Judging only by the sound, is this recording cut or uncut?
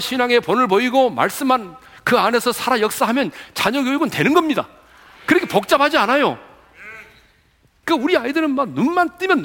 cut